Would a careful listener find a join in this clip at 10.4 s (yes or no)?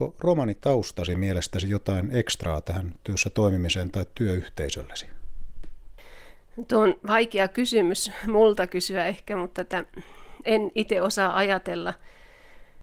yes